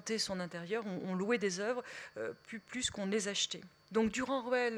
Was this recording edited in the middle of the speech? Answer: yes; 1 cut; at 3.9 s

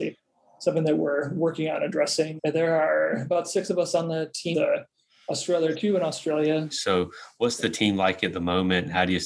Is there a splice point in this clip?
yes; 3 cuts; at 2.4 s, 4.5 s, 6.7 s

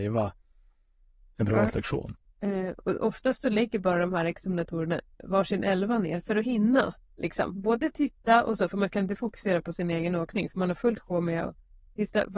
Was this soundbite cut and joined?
yes; 1 cut; at 2.3 s

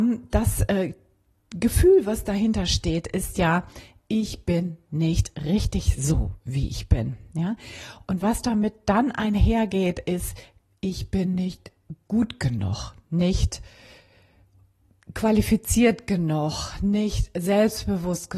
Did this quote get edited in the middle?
no; 0 cuts

